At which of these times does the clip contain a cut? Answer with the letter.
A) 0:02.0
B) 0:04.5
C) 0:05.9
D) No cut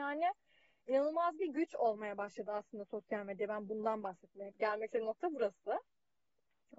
B